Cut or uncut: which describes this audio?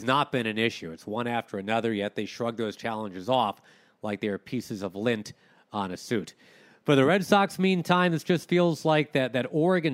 uncut